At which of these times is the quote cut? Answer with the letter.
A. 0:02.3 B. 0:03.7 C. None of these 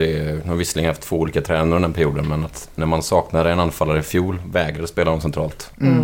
C